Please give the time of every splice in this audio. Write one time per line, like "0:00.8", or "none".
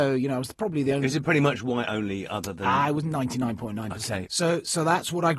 0:04.3